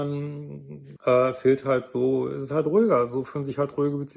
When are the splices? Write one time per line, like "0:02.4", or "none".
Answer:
0:01.0